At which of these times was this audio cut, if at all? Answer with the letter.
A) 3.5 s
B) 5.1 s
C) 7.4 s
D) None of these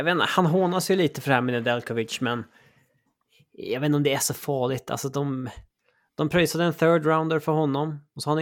D